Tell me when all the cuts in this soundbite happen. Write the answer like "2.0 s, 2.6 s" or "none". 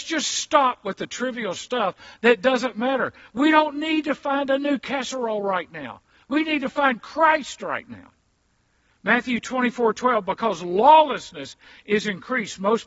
none